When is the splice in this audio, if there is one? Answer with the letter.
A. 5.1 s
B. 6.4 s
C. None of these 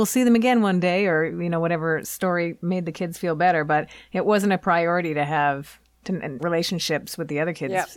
B